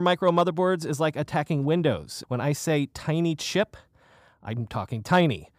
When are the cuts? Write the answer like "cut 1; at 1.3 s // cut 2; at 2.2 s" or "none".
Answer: cut 1; at 2.2 s